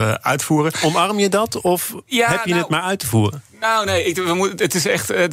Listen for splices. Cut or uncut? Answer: uncut